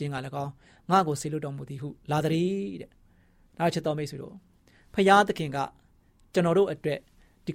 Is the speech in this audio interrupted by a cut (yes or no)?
no